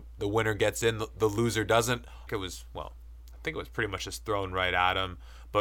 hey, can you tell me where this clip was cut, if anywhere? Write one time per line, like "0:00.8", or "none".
0:02.3